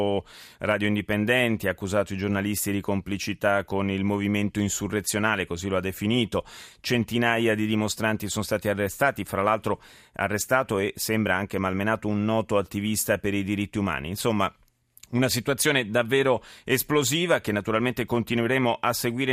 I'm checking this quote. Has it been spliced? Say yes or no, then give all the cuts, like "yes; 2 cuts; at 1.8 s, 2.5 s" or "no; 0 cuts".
no; 0 cuts